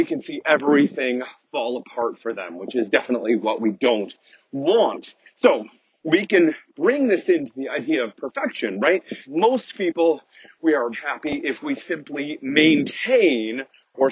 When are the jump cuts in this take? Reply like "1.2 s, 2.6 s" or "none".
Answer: 9.2 s, 10.9 s